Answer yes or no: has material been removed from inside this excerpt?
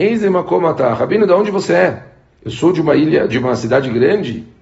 yes